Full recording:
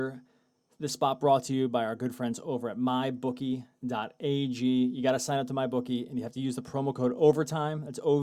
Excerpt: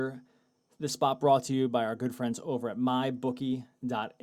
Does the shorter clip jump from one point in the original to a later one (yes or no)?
no